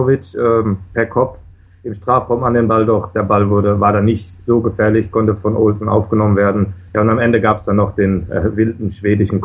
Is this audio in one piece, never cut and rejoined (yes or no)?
yes